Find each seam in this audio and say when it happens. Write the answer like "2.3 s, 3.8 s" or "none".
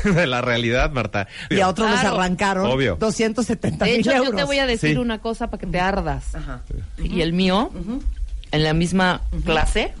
1.5 s, 7.0 s